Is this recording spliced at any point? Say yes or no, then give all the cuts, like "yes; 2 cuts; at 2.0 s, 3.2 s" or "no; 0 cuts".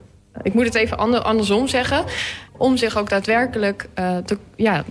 yes; 1 cut; at 2.5 s